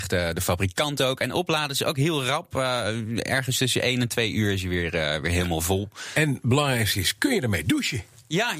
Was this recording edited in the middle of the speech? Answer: no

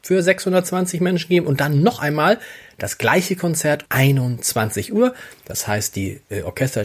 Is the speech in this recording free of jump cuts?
no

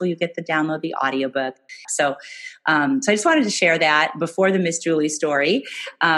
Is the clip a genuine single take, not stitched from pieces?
no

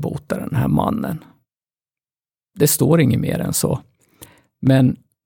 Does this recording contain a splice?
no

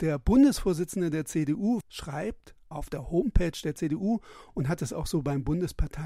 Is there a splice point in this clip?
yes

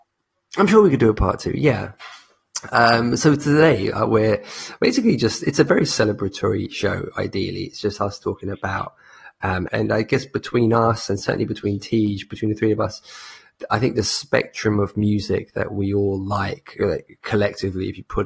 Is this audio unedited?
no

